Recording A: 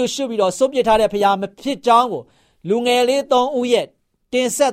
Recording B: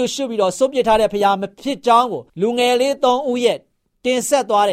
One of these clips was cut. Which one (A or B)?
B